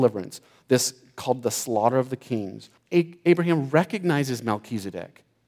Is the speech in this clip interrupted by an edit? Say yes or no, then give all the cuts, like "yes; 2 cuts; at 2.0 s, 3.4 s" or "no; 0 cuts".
yes; 1 cut; at 2.8 s